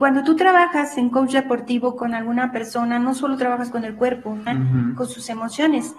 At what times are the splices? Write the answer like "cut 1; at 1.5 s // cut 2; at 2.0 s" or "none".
cut 1; at 4.5 s